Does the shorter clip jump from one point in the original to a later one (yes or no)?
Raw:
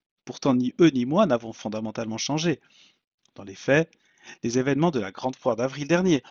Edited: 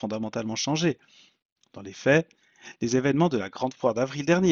no